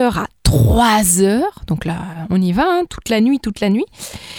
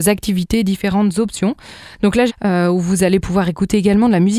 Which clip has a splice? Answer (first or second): second